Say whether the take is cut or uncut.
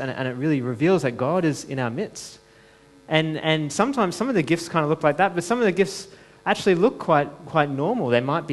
uncut